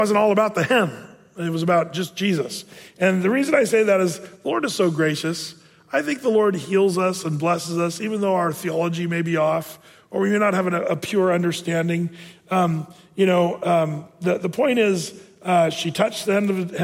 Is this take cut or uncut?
uncut